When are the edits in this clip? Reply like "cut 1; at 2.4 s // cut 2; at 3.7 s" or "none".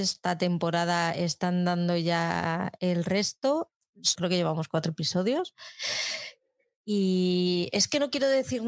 cut 1; at 4.1 s